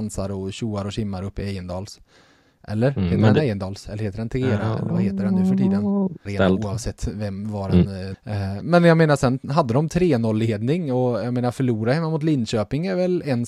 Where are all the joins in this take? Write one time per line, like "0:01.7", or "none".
0:06.3
0:08.1